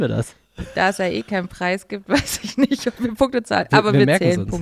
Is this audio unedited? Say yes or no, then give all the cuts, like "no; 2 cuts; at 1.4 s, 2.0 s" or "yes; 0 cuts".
yes; 0 cuts